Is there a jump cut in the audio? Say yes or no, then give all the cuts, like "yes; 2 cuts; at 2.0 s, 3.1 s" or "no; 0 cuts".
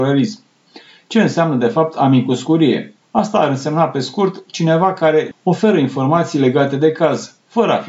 yes; 2 cuts; at 3.0 s, 5.3 s